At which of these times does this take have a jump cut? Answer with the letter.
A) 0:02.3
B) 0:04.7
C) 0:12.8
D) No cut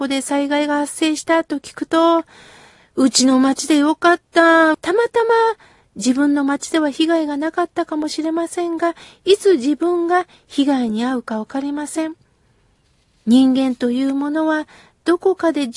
B